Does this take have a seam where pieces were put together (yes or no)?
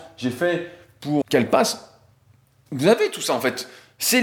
yes